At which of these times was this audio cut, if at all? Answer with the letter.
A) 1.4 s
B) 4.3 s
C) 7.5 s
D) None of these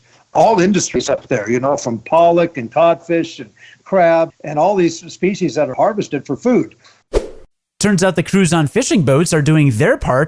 B